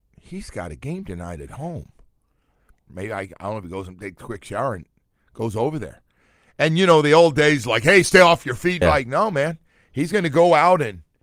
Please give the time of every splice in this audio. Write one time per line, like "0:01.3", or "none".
0:02.9
0:08.8